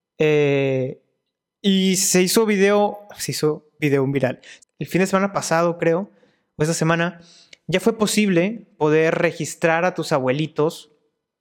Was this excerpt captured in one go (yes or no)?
no